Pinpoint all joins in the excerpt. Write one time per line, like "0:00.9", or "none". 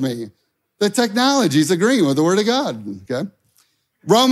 none